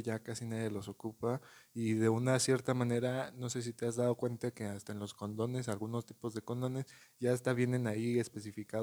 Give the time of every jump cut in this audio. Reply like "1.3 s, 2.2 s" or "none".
none